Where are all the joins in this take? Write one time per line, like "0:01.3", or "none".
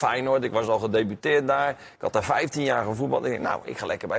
none